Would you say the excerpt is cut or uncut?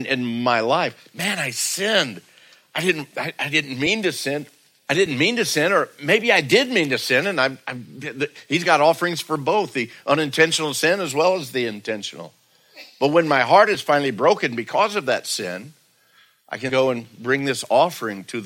cut